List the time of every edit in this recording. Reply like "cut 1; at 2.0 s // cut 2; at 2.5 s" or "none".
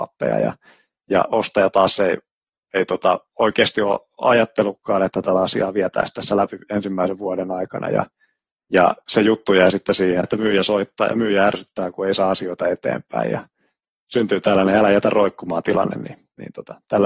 cut 1; at 10.2 s